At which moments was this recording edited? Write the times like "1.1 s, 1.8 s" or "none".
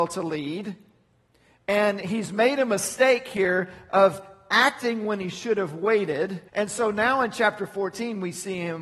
6.5 s